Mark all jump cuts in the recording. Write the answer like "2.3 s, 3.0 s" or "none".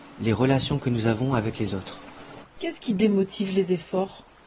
2.4 s